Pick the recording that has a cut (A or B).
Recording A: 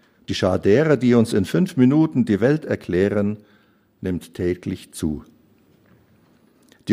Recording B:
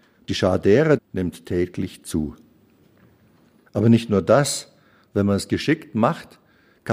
B